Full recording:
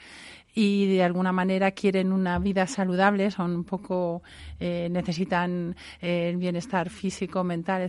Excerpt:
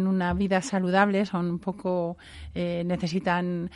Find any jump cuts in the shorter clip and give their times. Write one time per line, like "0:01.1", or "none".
none